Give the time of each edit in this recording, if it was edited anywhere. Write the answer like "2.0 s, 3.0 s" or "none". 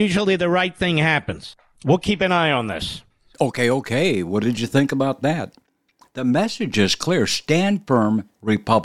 none